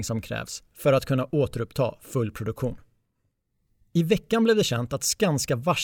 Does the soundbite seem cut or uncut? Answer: uncut